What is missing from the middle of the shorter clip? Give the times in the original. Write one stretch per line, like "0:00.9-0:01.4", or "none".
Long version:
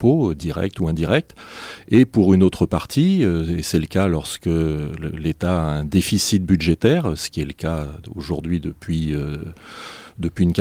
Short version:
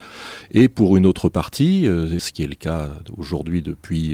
0:03.6-0:07.2